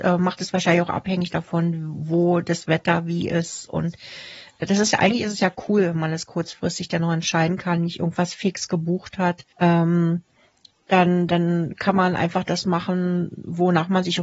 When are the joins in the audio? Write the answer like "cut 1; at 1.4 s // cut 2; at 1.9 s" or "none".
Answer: cut 1; at 9.5 s